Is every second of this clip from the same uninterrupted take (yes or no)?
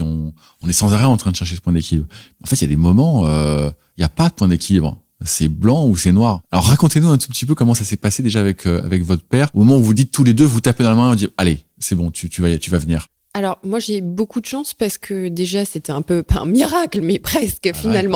yes